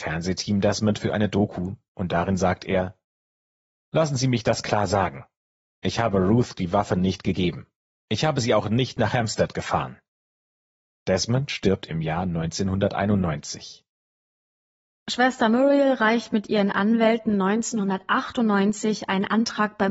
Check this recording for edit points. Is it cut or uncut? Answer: uncut